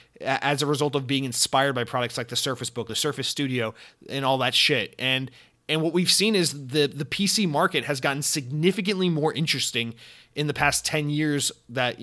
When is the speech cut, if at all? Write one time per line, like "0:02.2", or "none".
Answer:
0:02.9